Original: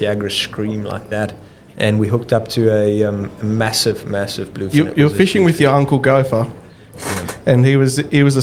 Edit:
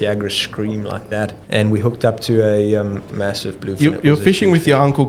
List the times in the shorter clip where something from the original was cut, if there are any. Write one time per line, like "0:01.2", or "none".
0:01.4
0:03.1